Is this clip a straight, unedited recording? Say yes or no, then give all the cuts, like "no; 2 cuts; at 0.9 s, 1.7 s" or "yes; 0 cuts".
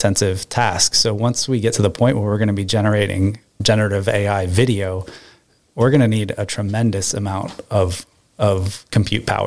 yes; 0 cuts